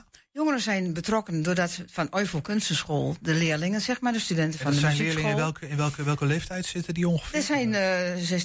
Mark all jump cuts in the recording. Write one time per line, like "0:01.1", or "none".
none